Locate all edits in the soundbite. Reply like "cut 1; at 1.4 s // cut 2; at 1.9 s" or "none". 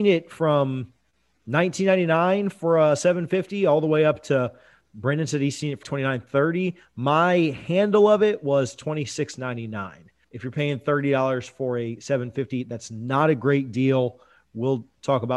cut 1; at 5.8 s // cut 2; at 10.2 s